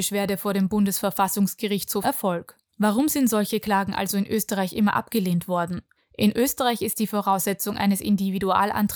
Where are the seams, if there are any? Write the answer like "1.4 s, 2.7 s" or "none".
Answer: 2.0 s, 6.0 s

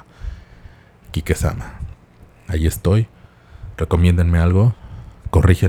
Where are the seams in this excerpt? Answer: none

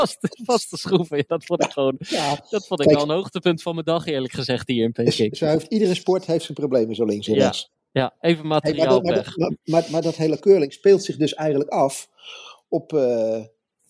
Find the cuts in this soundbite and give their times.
none

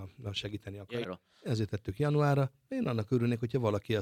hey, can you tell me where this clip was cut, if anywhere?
1.0 s

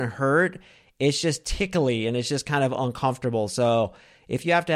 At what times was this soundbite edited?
none

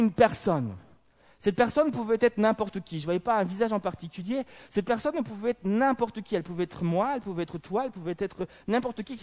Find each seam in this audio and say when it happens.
none

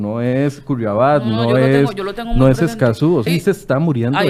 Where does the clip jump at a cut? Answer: 3.3 s

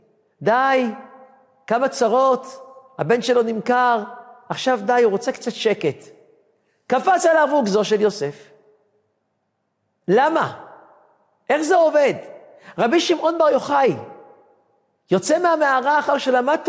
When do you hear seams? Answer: none

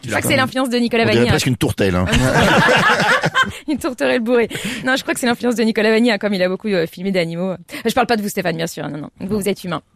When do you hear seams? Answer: 4.8 s

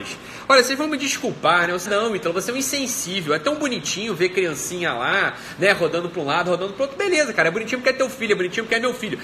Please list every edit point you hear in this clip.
1.9 s

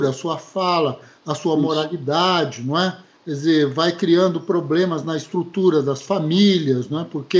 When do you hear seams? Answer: none

